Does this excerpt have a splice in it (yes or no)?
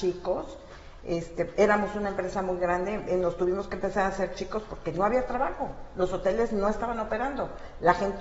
no